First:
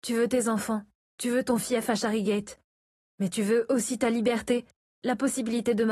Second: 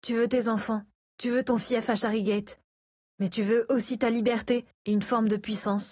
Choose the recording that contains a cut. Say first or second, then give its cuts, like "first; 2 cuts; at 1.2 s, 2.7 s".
second; 1 cut; at 4.8 s